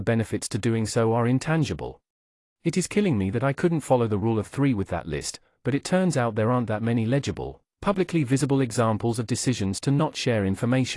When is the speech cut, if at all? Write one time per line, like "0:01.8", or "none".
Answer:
0:02.4